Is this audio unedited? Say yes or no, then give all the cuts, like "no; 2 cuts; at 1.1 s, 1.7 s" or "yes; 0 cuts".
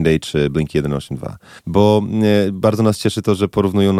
no; 1 cut; at 1.6 s